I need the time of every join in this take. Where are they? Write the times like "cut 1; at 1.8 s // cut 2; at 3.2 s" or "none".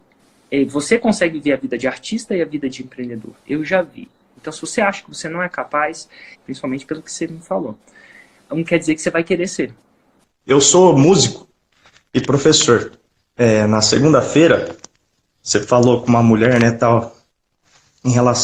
cut 1; at 6.3 s

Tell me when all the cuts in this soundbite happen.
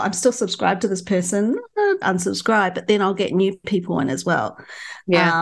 cut 1; at 2.0 s

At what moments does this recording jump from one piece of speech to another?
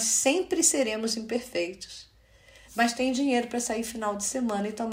cut 1; at 2.7 s

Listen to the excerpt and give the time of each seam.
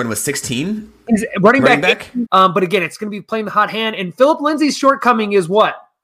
cut 1; at 2.2 s

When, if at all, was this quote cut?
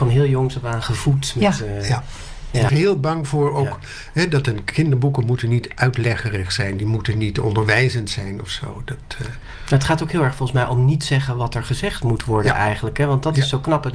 cut 1; at 2.7 s

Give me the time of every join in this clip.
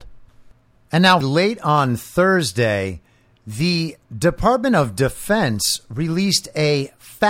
cut 1; at 1.2 s // cut 2; at 4.0 s

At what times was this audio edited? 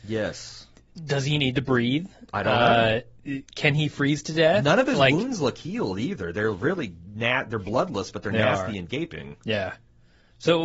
none

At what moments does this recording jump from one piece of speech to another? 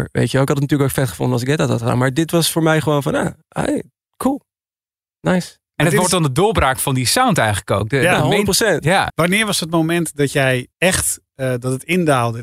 cut 1; at 9.1 s // cut 2; at 10.7 s

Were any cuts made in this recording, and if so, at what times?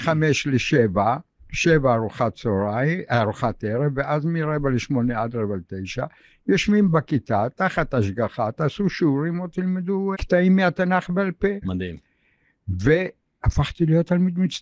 cut 1; at 10.1 s // cut 2; at 11.6 s

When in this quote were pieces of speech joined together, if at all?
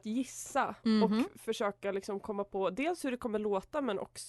none

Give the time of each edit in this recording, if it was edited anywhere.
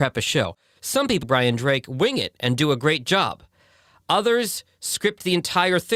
cut 1; at 1.2 s

